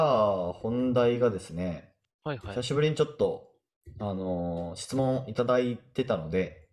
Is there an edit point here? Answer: no; 0 cuts

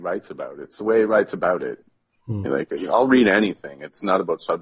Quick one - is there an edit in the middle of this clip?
yes; 1 cut; at 2.5 s

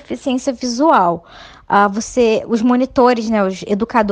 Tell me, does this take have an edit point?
no; 0 cuts

